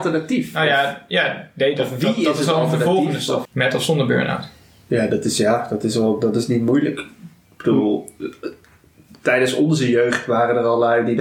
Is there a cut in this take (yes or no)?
yes